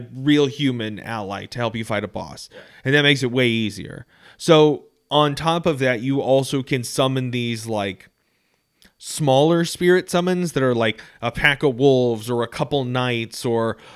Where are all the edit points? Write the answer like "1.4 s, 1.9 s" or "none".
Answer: none